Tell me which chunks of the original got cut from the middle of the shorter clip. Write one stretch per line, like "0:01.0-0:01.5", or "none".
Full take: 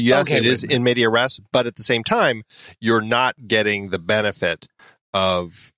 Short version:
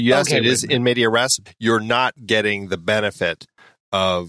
0:01.5-0:02.7